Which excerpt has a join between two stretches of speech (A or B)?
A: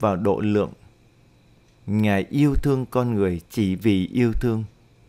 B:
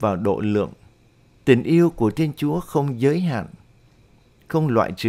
B